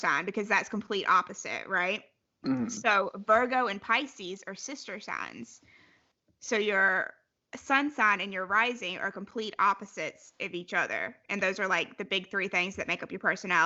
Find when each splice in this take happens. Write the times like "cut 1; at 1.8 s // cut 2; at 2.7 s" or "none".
none